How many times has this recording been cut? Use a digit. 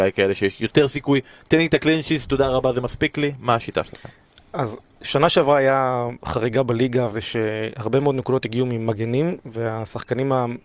1